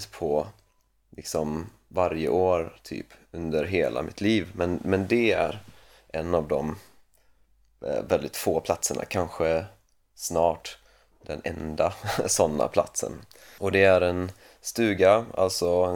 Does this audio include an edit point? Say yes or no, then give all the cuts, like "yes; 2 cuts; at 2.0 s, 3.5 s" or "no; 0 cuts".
yes; 1 cut; at 13.6 s